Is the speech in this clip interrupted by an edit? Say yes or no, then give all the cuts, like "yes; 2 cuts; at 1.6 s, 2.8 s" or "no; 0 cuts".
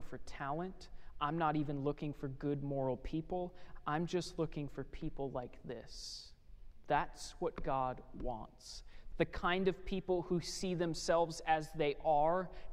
yes; 1 cut; at 9.1 s